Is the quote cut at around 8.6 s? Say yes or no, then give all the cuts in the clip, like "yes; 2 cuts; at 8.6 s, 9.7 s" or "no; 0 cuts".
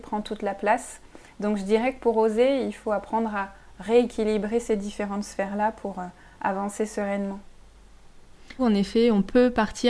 yes; 1 cut; at 8.6 s